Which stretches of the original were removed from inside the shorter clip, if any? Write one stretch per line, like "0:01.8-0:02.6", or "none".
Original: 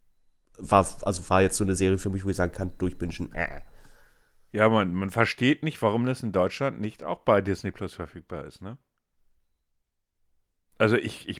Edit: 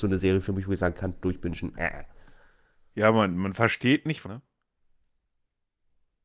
0:05.8-0:08.6